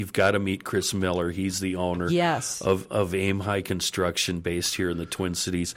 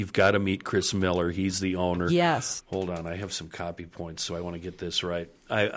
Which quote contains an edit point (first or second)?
second